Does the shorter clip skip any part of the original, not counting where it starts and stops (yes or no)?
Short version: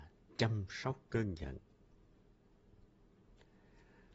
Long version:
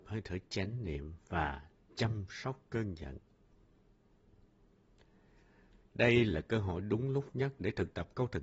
no